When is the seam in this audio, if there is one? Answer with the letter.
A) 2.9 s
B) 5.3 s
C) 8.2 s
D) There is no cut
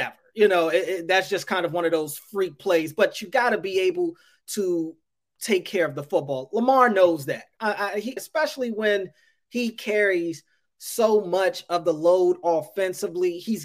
C